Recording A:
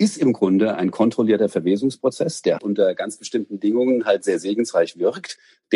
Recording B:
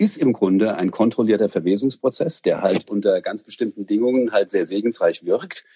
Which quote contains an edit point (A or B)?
A